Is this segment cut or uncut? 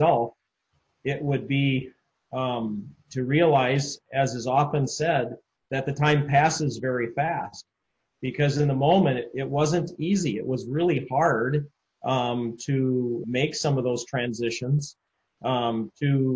cut